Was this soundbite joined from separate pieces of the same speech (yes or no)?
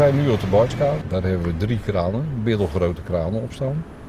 yes